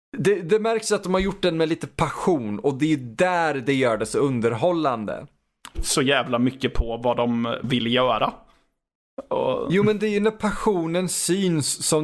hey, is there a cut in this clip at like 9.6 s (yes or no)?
no